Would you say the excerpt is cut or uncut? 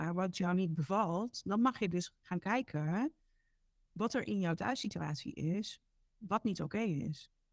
uncut